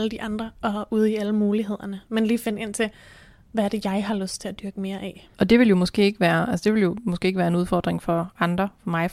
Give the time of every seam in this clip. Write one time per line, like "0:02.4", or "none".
0:05.3